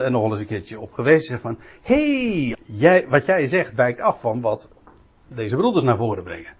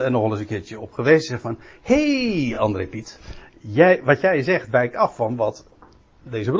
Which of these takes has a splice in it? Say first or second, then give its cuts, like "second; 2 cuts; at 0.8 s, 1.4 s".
first; 1 cut; at 2.5 s